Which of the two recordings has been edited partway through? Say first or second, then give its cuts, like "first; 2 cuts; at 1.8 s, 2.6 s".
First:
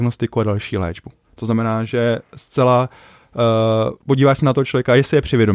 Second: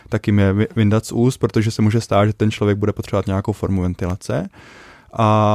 first; 1 cut; at 4.0 s